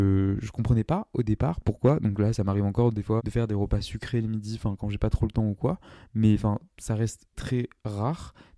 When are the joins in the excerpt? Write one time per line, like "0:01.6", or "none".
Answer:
0:03.2
0:07.3